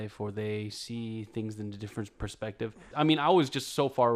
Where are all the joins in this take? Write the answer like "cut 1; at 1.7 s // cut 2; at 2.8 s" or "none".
cut 1; at 2.9 s